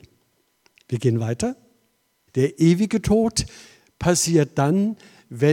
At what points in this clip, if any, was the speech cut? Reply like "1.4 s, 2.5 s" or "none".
2.3 s